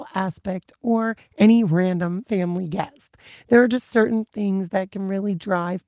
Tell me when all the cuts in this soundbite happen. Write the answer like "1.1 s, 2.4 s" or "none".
3.4 s